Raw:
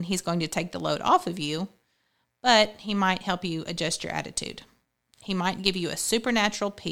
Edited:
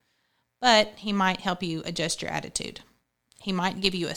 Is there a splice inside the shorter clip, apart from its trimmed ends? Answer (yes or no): no